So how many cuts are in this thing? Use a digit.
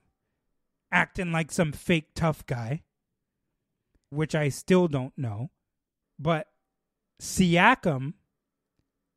2